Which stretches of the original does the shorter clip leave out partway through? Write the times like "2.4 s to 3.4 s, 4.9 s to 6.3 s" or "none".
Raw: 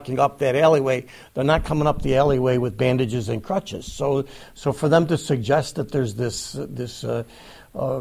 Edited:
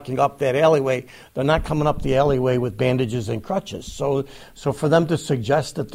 none